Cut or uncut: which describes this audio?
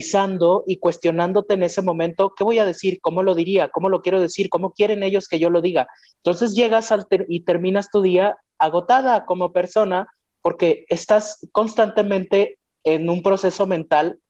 uncut